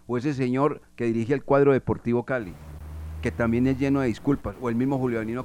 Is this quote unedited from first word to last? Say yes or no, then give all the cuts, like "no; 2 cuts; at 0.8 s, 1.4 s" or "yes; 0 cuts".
yes; 0 cuts